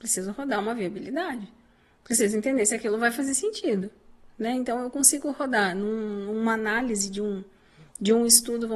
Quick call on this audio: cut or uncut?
uncut